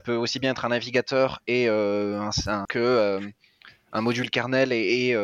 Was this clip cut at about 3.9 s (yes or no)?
no